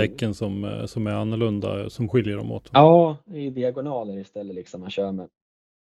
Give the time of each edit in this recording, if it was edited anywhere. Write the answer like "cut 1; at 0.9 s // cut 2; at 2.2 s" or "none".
none